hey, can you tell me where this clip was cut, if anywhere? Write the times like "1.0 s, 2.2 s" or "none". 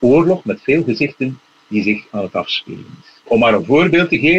3.2 s